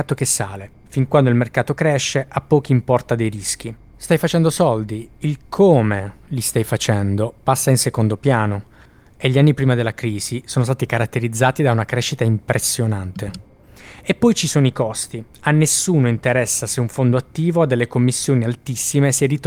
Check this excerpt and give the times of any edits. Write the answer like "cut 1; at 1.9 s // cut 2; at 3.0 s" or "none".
none